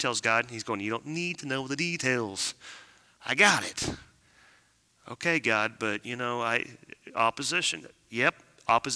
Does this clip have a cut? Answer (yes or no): no